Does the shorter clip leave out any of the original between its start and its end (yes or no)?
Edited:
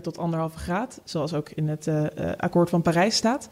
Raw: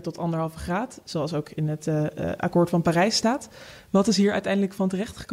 no